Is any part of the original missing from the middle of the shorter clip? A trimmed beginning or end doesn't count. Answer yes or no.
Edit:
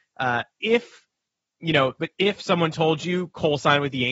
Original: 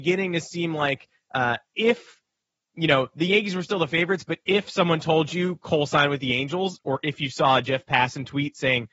yes